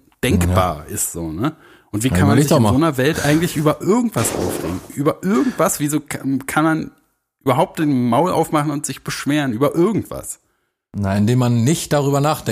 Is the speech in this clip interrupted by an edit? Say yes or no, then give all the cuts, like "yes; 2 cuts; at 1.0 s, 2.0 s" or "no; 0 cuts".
no; 0 cuts